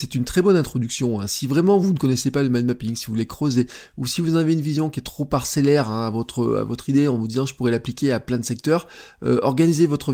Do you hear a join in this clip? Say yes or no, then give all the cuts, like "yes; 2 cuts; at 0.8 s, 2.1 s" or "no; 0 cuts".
no; 0 cuts